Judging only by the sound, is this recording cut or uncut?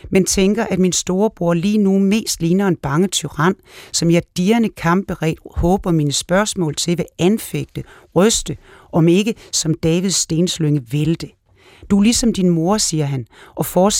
cut